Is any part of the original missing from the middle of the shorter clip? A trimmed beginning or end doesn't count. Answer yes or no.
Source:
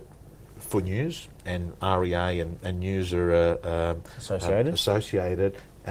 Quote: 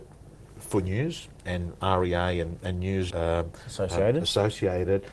yes